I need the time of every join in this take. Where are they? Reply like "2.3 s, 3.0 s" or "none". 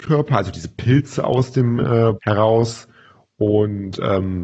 2.1 s